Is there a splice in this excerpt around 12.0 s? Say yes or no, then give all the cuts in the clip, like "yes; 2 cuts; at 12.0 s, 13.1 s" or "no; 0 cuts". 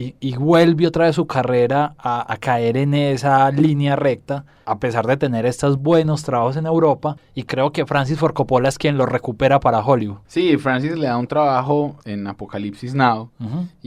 yes; 1 cut; at 12.0 s